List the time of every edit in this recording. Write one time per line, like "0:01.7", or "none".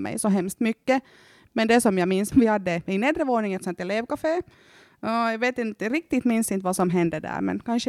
0:02.3